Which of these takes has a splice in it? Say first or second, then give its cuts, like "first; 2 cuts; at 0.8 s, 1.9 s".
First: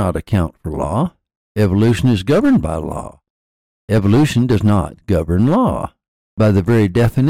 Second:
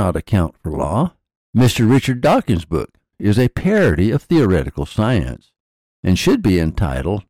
second; 2 cuts; at 1.4 s, 3.1 s